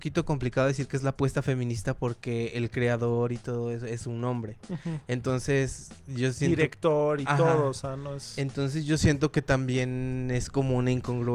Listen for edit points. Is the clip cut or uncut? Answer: uncut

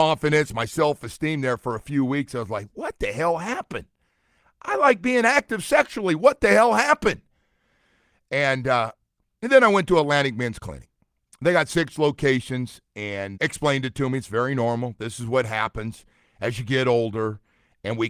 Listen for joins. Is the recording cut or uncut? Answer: cut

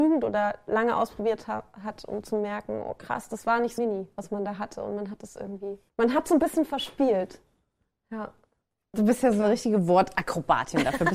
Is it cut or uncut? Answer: cut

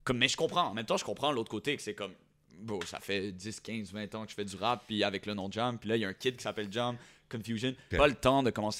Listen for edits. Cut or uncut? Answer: cut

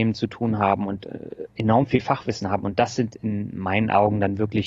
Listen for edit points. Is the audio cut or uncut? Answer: uncut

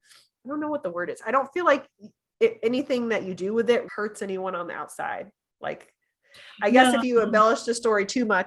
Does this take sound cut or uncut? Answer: cut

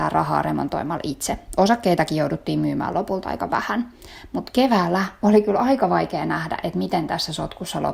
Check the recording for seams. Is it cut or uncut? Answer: uncut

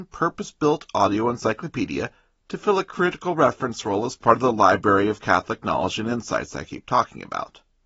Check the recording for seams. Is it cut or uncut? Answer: uncut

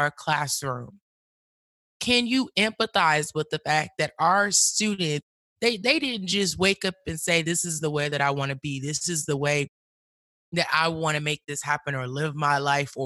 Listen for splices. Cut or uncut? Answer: uncut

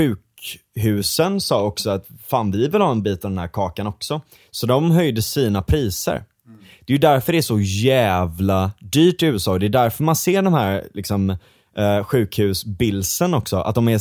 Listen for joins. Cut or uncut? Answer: uncut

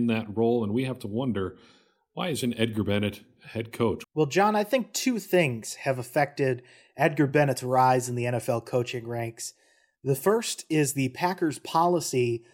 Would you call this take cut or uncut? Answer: cut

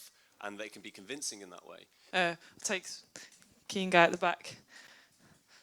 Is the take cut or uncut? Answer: cut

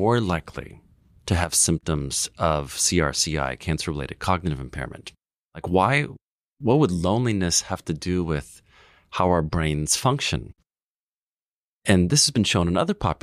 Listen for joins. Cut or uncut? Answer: cut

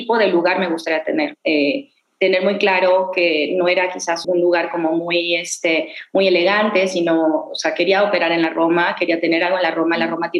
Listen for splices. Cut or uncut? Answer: cut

